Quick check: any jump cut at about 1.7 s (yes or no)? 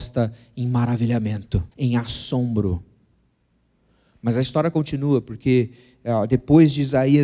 yes